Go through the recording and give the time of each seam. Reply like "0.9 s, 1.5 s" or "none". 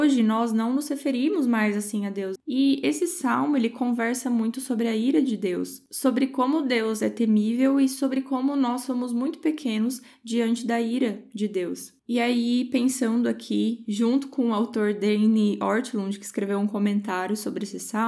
2.4 s